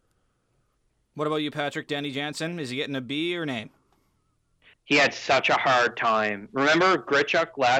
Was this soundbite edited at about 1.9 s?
no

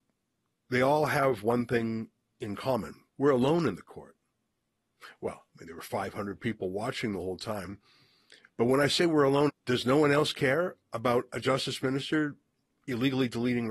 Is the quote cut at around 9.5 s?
yes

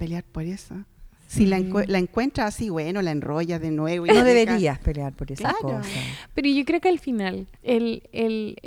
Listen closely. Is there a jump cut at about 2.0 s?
no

